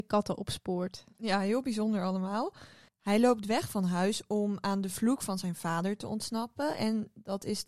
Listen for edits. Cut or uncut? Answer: cut